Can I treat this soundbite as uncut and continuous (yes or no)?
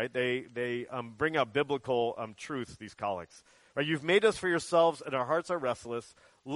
yes